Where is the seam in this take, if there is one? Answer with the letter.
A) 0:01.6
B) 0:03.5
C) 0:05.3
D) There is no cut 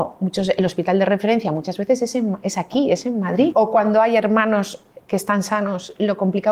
B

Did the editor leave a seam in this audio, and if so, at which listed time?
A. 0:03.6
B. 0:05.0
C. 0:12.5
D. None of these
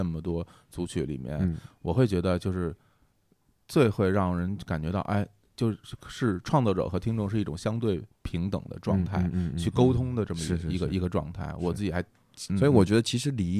C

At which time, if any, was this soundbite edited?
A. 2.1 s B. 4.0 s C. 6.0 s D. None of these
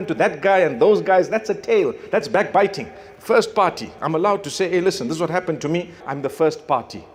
C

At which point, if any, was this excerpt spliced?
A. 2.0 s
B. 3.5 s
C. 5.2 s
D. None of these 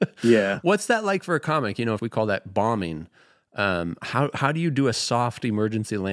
A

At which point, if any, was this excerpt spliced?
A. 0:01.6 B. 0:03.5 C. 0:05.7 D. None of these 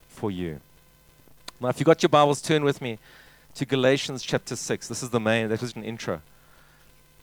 C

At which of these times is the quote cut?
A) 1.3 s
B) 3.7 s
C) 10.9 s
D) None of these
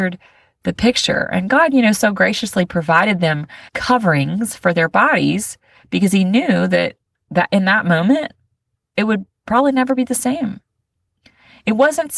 B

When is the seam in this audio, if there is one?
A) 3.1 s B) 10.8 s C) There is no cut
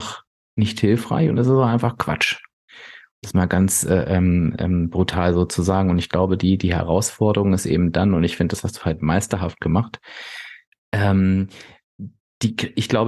B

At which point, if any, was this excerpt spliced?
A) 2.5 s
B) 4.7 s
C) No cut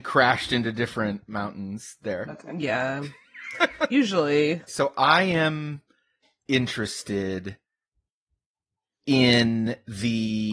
B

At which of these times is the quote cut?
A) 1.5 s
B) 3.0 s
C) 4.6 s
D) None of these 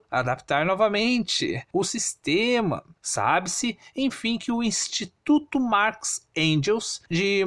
B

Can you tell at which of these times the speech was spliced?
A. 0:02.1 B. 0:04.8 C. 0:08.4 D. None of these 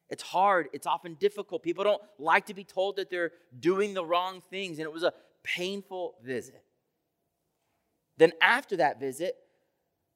D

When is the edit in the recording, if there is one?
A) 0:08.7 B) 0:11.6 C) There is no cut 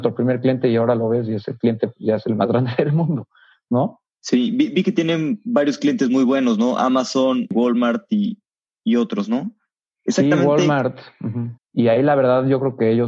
B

